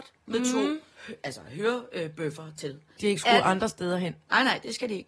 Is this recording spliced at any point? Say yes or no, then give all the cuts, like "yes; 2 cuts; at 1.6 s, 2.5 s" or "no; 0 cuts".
yes; 2 cuts; at 0.9 s, 3.0 s